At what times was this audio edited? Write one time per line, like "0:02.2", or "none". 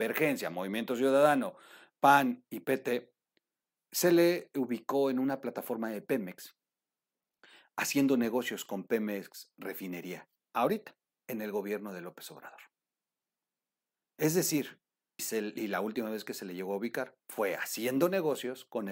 0:01.9
0:15.2
0:17.2